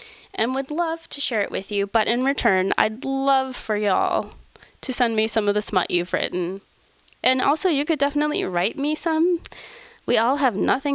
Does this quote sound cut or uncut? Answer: uncut